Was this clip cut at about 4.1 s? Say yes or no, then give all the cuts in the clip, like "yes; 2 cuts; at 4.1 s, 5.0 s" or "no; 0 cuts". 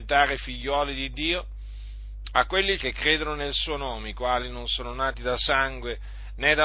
no; 1 cut; at 2.8 s